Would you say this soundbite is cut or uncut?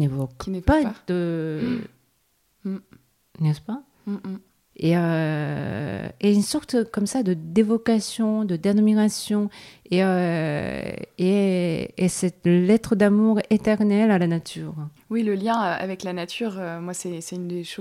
cut